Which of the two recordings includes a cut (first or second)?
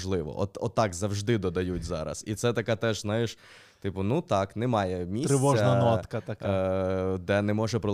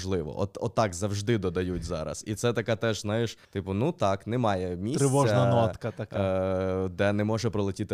second